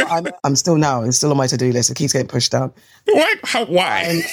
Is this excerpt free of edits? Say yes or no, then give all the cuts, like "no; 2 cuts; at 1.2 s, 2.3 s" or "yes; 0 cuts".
yes; 0 cuts